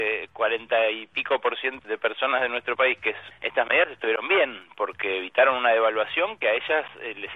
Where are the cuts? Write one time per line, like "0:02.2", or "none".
0:01.8
0:03.3